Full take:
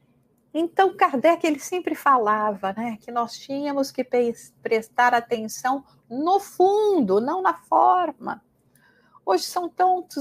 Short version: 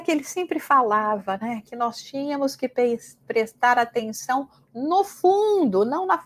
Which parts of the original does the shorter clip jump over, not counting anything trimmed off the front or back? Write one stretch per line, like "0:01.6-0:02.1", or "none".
none